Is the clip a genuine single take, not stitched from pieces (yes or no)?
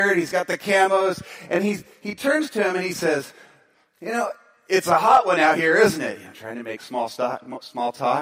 yes